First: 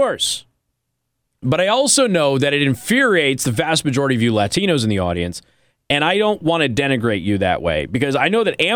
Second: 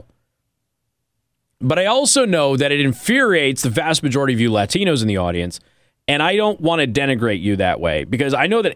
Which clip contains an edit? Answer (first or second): first